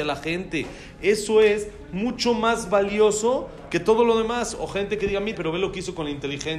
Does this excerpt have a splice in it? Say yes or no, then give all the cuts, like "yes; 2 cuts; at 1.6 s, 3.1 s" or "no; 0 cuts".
yes; 1 cut; at 5.3 s